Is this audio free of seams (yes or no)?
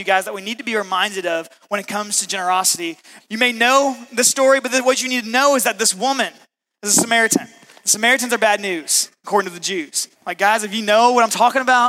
no